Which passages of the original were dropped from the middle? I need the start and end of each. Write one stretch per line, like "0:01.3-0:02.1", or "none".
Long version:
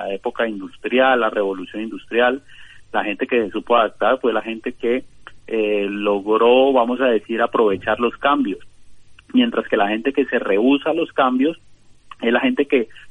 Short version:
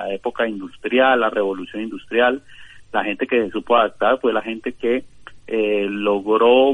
none